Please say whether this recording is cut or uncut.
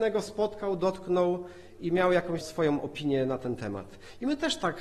cut